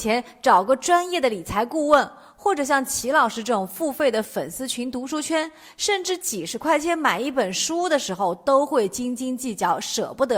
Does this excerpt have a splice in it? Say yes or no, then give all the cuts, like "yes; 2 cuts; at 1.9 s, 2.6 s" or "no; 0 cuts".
no; 0 cuts